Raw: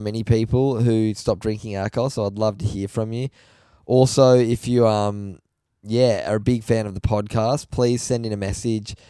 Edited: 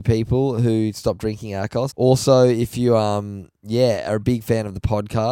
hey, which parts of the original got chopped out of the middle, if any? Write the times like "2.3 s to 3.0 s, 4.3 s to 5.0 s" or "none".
2.1 s to 3.8 s, 5.5 s to 5.8 s